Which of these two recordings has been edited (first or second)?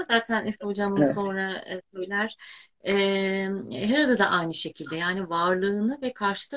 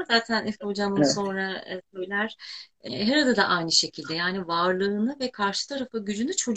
second